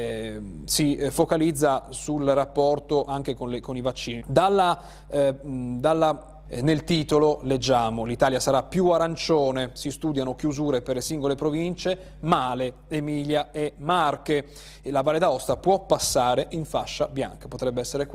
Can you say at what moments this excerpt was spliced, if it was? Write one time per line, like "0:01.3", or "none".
0:04.2
0:06.5